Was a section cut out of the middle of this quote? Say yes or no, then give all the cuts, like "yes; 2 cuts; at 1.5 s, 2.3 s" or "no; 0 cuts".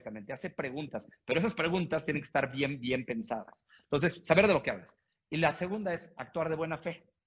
no; 0 cuts